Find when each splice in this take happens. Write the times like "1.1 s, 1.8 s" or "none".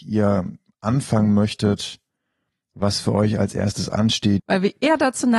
4.4 s